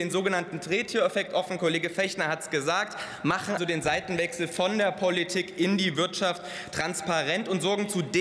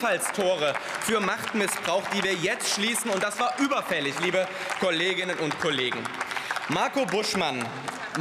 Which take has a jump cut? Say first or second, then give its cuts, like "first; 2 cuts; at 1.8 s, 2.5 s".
first; 1 cut; at 3.6 s